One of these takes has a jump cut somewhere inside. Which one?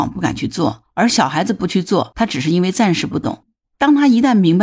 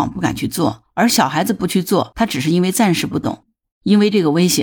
second; 1 cut; at 3.7 s

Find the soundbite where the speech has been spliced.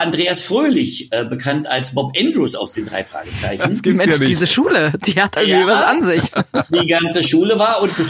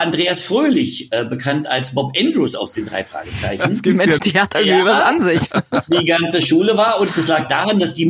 second; 1 cut; at 4.2 s

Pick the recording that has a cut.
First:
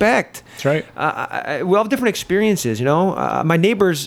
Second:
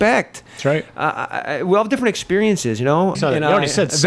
second; 1 cut; at 3.1 s

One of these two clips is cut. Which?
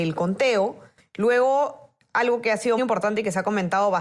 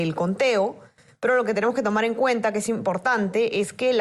first; 2 cuts; at 1.0 s, 2.8 s

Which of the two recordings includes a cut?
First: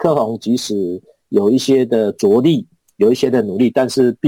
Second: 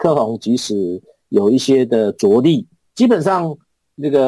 second; 1 cut; at 2.8 s

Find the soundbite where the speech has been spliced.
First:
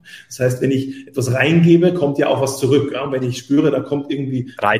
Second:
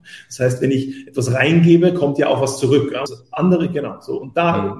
second; 1 cut; at 3.1 s

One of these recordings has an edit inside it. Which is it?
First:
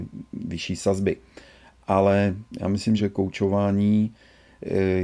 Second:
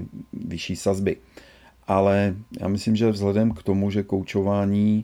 first; 1 cut; at 3.0 s

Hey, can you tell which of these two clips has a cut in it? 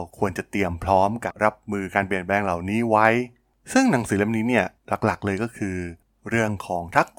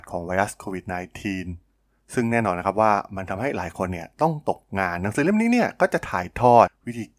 first; 2 cuts; at 1.3 s, 4.8 s

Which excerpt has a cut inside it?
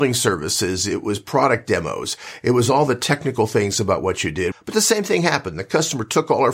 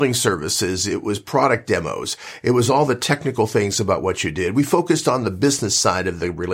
first; 1 cut; at 4.5 s

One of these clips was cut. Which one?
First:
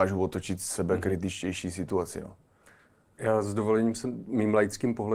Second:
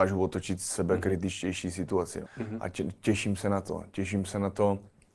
second; 1 cut; at 2.2 s

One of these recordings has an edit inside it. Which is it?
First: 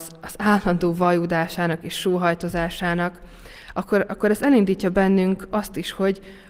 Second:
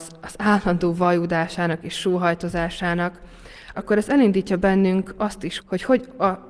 second; 2 cuts; at 3.7 s, 5.6 s

